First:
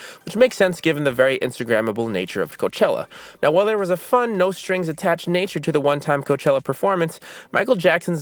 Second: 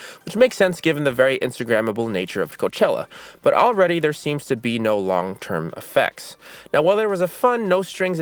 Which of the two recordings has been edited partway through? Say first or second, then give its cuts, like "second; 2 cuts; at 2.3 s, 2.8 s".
first; 1 cut; at 3.4 s